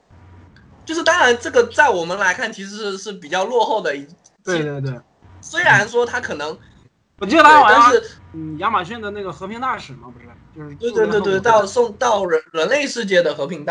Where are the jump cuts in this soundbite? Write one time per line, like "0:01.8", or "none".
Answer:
0:06.8
0:08.2